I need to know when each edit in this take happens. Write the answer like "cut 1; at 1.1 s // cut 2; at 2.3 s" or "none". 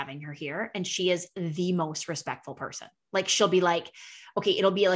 none